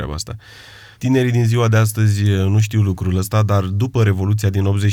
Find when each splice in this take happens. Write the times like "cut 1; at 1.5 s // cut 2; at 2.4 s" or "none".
cut 1; at 0.9 s